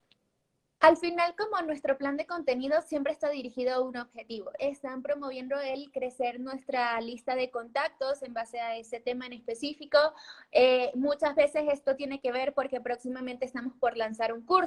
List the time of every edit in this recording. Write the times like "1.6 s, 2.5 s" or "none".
4.6 s